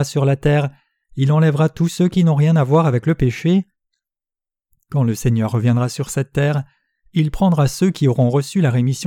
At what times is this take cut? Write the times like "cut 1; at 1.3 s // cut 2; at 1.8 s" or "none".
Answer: none